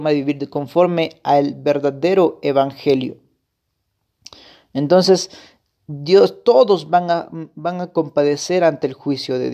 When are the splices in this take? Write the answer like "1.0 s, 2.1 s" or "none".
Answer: none